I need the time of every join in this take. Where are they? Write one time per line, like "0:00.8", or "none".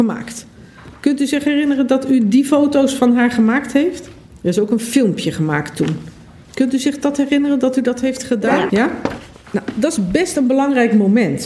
0:06.5
0:08.7

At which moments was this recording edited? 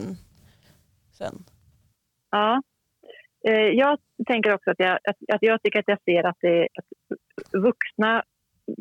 0:06.6

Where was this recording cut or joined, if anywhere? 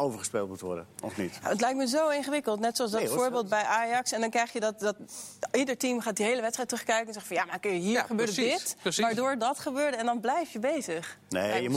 none

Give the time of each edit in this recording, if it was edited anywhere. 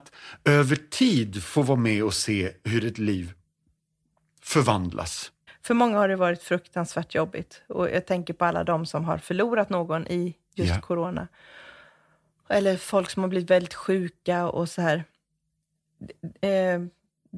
0:05.5

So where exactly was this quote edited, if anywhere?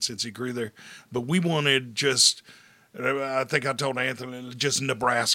none

